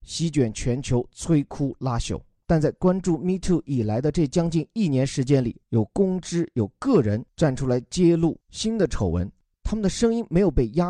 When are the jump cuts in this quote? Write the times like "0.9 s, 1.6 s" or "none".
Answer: 2.4 s, 5.6 s